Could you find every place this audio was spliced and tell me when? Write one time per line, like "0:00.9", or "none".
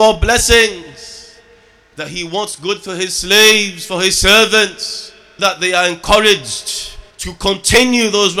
0:05.4
0:07.1